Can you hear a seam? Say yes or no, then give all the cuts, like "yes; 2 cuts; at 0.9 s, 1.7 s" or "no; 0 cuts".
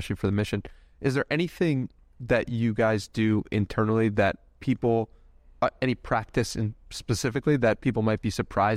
no; 0 cuts